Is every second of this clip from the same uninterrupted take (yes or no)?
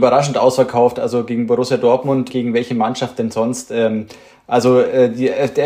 no